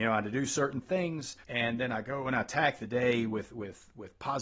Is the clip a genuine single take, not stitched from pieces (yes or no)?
no